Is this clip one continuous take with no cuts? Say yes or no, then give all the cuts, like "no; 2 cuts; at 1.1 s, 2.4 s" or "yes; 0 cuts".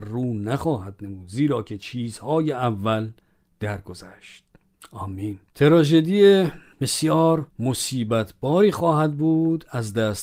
no; 2 cuts; at 5.5 s, 7.5 s